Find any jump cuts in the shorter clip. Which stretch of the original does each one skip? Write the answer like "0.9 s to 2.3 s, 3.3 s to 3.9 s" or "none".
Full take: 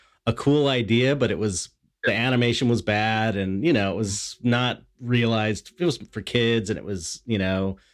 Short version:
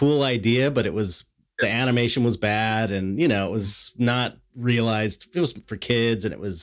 none